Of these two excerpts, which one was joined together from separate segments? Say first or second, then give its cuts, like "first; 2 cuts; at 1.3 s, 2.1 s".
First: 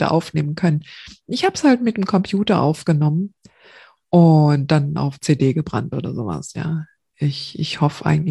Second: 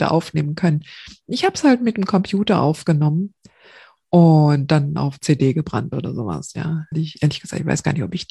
second; 1 cut; at 6.9 s